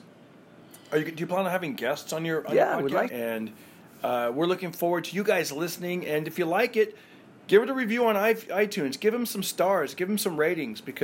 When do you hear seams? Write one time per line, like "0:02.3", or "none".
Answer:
0:03.1